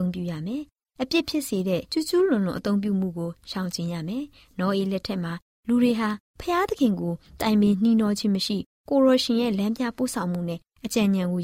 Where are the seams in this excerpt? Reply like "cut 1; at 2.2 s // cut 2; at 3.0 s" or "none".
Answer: cut 1; at 1.9 s